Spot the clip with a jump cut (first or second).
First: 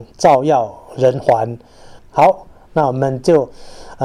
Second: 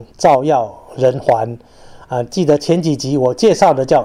first